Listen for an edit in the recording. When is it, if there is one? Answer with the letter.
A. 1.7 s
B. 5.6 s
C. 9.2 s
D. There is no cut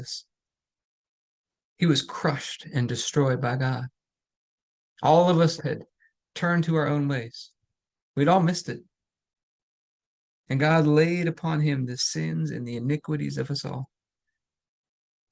B